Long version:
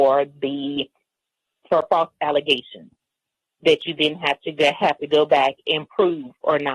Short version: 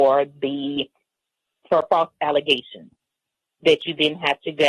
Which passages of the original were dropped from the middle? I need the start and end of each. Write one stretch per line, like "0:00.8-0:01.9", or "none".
none